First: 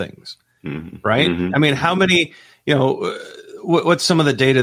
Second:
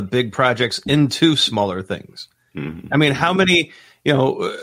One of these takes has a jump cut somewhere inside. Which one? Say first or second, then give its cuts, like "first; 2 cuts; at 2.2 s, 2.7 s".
second; 1 cut; at 2.9 s